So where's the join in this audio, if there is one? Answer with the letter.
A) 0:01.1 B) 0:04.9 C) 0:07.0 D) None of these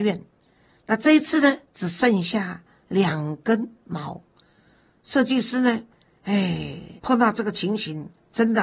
C